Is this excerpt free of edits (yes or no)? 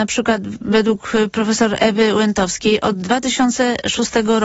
yes